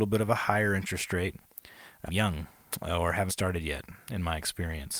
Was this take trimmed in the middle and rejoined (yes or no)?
yes